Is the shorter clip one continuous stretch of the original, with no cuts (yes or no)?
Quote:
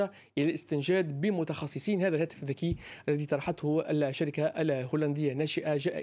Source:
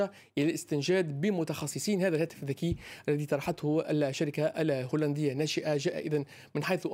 yes